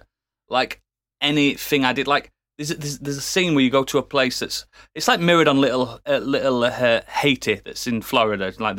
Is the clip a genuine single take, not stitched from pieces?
yes; 0 cuts

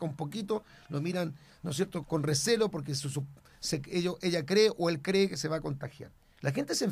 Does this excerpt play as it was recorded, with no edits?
no; 1 cut; at 2.0 s

